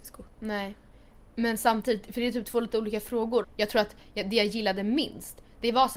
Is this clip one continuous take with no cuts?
no; 1 cut; at 3.4 s

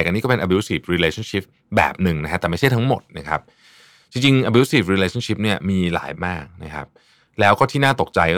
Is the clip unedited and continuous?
no; 1 cut; at 6.1 s

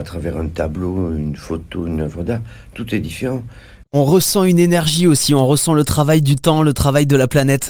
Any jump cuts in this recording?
yes; 1 cut; at 3.8 s

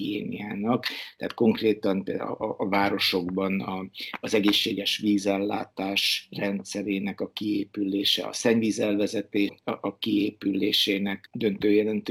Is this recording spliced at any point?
yes; 1 cut; at 9.5 s

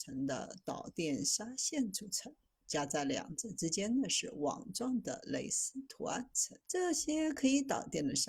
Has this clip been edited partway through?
yes; 1 cut; at 6.6 s

